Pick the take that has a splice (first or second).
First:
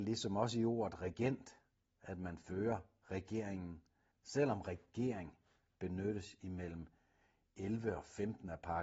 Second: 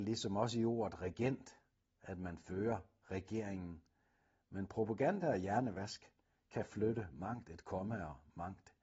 first